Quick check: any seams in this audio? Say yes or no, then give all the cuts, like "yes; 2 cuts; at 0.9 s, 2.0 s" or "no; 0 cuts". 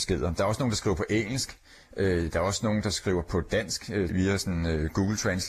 yes; 1 cut; at 4.1 s